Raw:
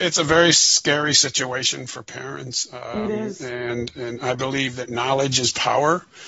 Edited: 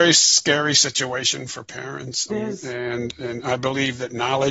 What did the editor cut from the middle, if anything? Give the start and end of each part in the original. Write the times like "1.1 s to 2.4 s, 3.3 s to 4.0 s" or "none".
2.7 s to 3.1 s

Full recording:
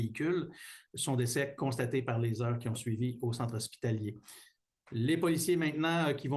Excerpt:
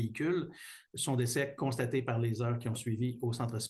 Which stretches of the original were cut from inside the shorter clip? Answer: none

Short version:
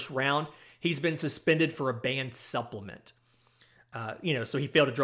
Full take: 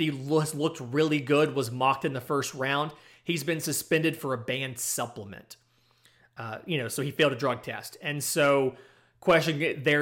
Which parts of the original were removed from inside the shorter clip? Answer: none

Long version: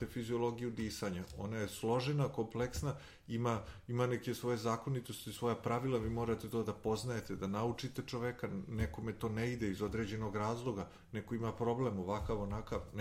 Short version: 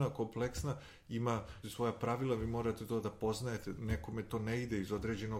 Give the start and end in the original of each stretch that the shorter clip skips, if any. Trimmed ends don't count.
3.8 s to 5.3 s, 7.4 s to 8.7 s

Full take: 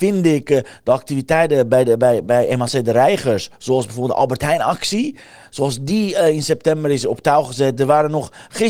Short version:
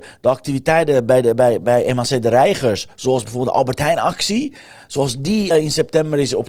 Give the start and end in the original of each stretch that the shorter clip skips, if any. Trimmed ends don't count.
6.1 s to 6.2 s

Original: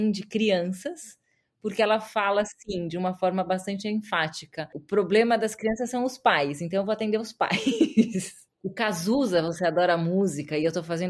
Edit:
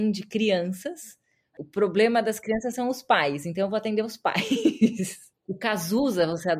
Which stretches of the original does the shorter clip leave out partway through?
1.5 s to 4.7 s

